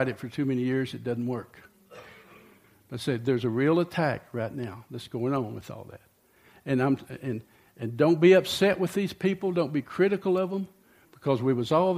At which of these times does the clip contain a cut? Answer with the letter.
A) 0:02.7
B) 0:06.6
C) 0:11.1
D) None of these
D